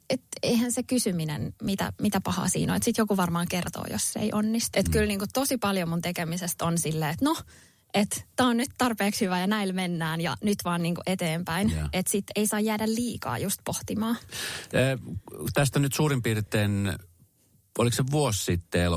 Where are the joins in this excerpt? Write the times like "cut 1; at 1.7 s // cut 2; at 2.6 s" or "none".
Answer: cut 1; at 4.7 s